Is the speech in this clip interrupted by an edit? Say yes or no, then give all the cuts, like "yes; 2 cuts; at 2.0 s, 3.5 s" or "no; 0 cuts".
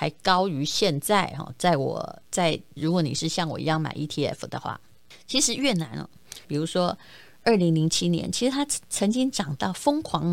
yes; 2 cuts; at 2.8 s, 6.4 s